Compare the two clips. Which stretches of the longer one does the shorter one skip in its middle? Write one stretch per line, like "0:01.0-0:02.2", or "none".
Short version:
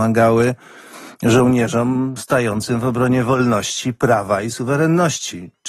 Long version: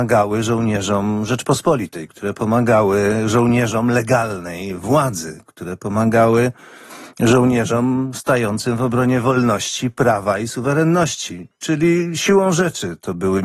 none